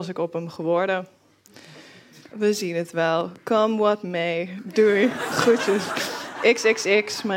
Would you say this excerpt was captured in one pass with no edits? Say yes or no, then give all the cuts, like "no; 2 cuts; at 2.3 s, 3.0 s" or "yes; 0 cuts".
no; 1 cut; at 2.2 s